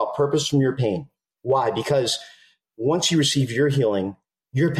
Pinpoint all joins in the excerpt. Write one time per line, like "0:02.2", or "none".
none